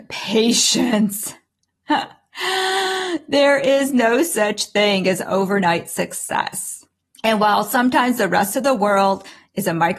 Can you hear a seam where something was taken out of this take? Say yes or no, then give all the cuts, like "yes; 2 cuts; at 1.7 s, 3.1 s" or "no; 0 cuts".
no; 0 cuts